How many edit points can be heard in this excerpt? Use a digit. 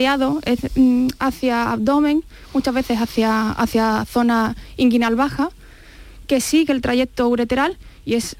0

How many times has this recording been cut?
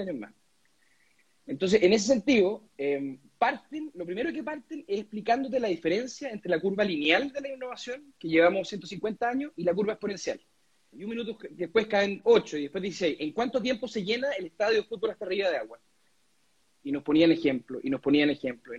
2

